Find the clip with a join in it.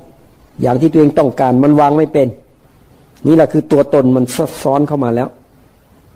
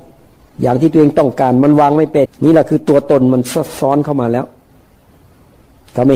second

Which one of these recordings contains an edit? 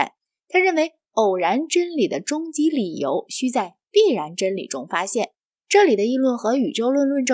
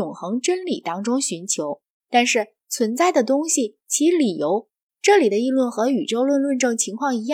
second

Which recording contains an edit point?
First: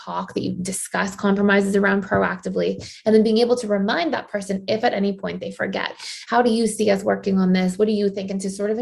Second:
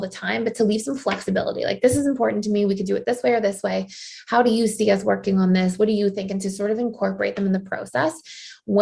first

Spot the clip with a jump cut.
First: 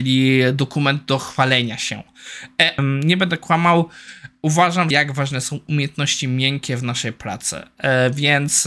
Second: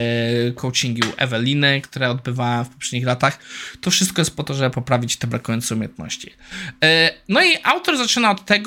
first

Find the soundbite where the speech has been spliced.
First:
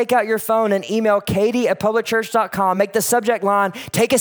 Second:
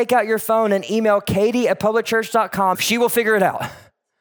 second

